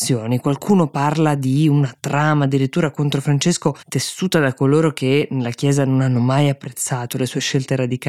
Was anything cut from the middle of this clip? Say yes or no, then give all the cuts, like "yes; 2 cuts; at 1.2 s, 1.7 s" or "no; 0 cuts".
yes; 1 cut; at 3.8 s